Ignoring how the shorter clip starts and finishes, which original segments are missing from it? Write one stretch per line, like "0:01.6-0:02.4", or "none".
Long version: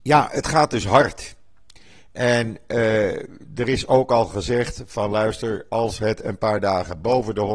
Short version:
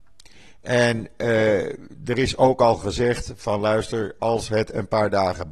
none